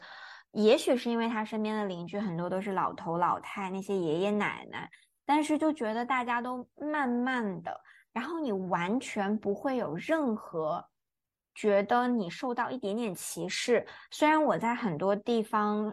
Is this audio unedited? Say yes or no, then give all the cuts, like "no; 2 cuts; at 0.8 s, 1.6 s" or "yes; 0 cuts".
yes; 0 cuts